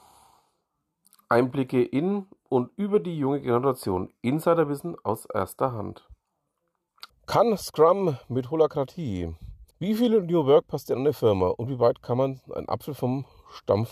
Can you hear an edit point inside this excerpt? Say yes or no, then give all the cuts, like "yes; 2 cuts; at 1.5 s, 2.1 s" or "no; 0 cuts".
yes; 2 cuts; at 7.1 s, 9.7 s